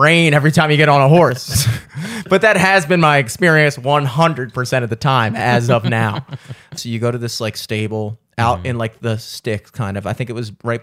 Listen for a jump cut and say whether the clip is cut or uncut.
cut